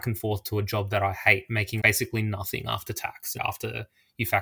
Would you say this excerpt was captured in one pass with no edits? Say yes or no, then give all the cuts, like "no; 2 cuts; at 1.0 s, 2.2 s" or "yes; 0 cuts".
no; 2 cuts; at 1.8 s, 3.4 s